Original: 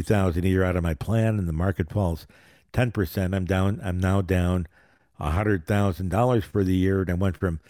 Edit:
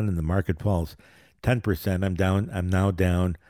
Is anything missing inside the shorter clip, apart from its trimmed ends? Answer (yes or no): no